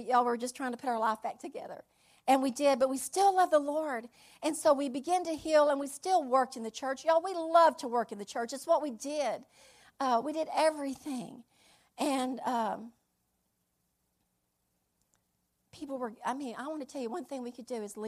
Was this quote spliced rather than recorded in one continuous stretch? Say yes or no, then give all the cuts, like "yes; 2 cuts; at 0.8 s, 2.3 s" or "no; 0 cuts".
no; 0 cuts